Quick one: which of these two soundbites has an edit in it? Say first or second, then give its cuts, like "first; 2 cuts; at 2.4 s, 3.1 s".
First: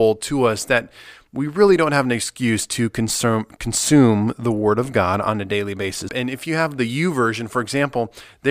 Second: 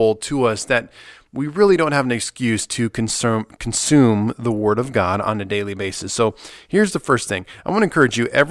first; 1 cut; at 6.1 s